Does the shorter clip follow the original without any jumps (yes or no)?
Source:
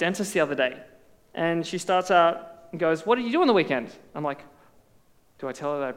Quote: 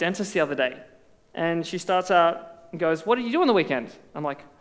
yes